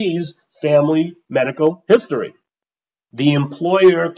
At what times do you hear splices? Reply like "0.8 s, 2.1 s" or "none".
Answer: 2.9 s